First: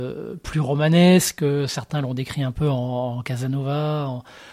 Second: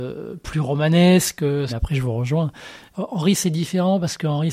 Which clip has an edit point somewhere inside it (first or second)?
second